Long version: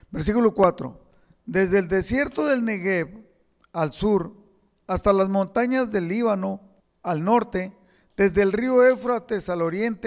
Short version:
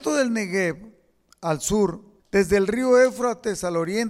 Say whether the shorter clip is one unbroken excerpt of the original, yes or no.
no